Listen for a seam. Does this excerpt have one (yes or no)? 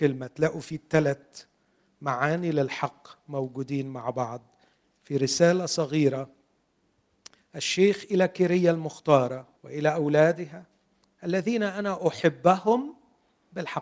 yes